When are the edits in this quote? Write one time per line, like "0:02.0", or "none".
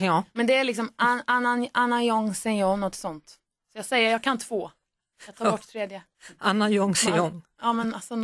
none

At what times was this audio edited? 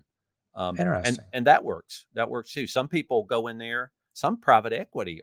none

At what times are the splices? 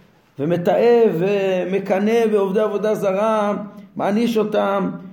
none

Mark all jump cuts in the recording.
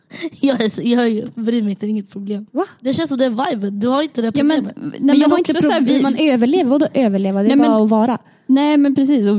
0:02.5

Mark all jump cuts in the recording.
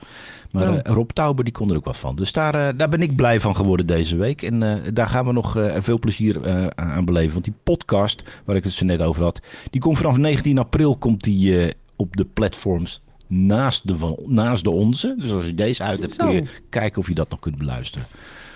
none

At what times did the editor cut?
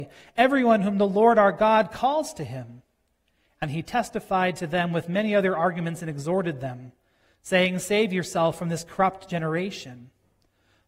none

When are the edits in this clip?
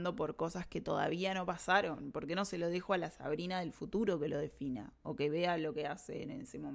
none

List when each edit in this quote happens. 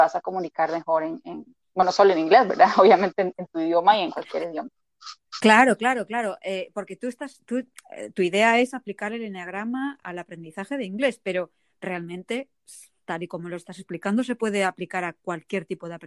none

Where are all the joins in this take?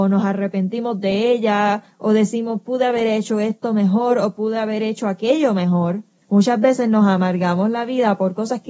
0:06.2

